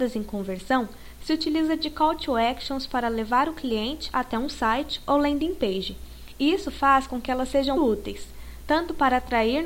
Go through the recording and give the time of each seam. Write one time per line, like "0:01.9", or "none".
0:07.8